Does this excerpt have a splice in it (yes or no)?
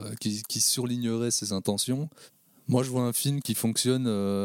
yes